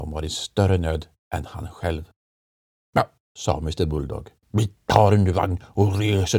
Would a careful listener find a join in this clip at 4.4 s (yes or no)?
no